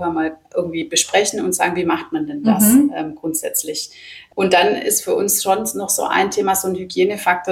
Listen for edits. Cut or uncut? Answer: uncut